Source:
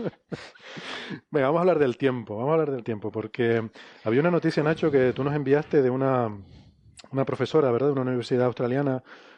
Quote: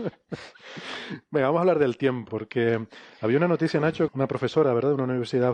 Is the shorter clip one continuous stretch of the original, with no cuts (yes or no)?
no